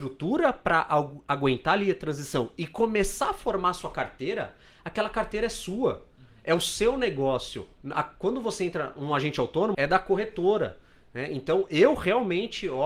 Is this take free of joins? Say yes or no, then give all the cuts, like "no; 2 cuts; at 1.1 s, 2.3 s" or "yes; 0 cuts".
no; 1 cut; at 9.7 s